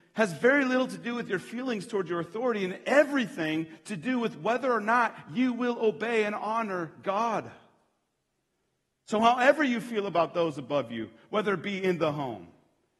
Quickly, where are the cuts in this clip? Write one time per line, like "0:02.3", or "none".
none